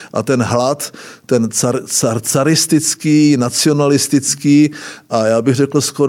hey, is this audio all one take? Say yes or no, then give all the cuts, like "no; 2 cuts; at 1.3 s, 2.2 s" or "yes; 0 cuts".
yes; 0 cuts